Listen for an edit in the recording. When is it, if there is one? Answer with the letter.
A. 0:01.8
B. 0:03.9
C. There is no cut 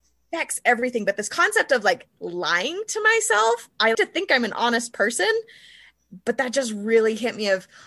B